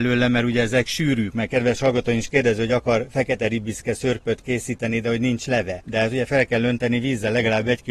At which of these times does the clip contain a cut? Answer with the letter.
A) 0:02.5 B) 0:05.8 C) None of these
C